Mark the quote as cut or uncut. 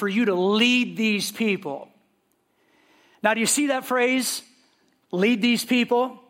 uncut